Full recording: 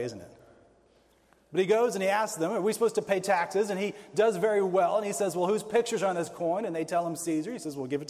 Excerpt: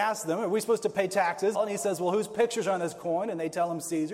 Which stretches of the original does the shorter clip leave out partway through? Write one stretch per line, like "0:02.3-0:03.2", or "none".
0:03.7-0:04.9